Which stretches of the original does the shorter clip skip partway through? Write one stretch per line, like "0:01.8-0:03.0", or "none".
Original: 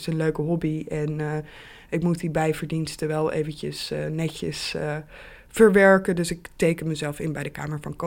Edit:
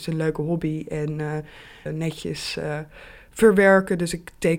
0:01.9-0:04.0